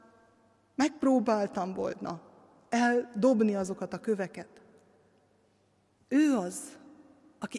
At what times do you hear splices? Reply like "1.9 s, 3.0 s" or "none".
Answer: 6.0 s